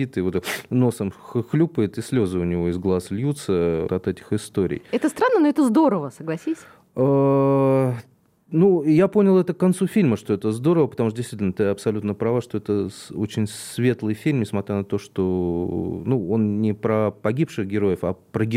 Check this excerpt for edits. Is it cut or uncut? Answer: cut